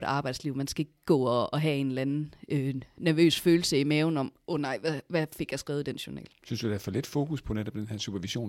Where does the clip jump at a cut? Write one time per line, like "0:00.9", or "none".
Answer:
none